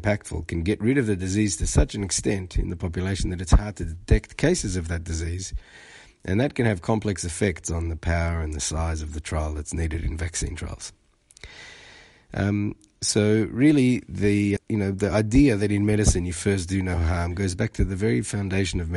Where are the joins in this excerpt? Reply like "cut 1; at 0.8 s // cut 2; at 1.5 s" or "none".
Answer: cut 1; at 14.6 s

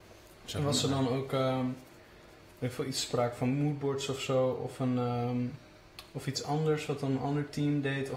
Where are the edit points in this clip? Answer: none

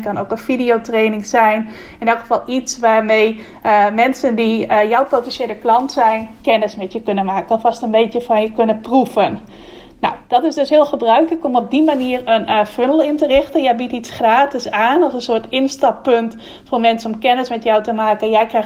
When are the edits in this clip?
none

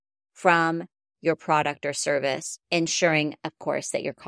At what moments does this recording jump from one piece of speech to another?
cut 1; at 2.6 s

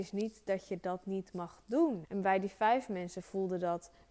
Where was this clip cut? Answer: cut 1; at 2.0 s

